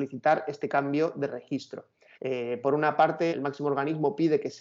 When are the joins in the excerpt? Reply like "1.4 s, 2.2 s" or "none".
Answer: 2.1 s, 3.3 s